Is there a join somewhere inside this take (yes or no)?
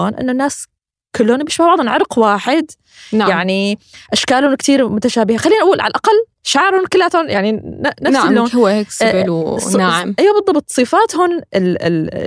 no